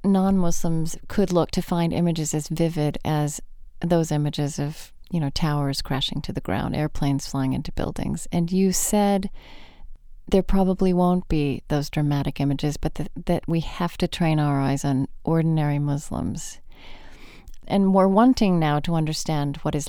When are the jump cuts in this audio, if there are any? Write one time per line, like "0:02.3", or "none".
0:17.6